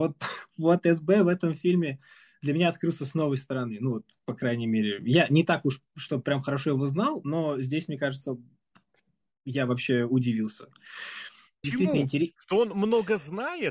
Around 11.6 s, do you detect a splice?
yes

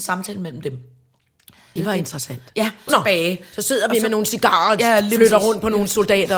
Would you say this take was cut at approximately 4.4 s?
no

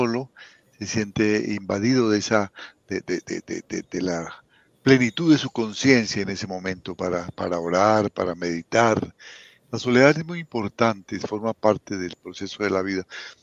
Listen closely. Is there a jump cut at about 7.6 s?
no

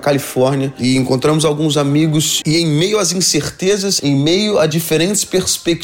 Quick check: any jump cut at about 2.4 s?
yes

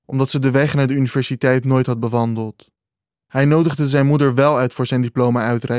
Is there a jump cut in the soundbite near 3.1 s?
yes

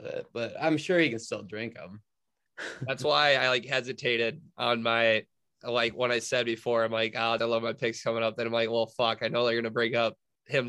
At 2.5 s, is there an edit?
yes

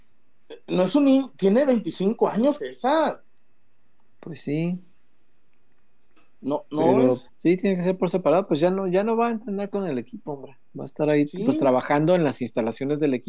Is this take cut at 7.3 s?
yes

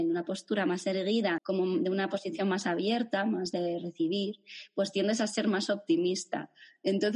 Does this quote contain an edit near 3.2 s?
no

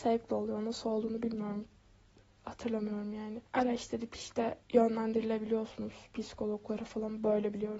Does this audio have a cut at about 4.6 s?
yes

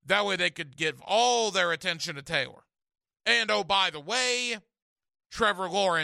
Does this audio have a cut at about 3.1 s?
yes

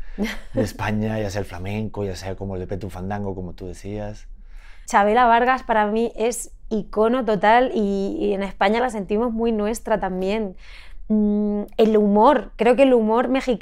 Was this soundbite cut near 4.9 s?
yes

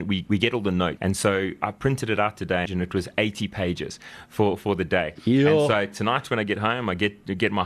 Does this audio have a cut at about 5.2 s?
no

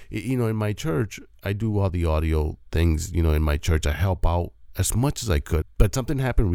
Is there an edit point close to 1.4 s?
no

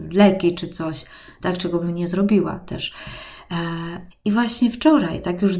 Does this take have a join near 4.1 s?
yes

